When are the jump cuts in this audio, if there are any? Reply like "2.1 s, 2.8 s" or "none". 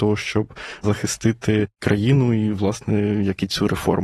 none